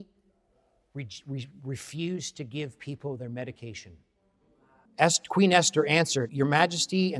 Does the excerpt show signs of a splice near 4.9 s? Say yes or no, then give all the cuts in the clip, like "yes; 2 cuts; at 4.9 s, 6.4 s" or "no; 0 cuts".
yes; 2 cuts; at 4.9 s, 6.3 s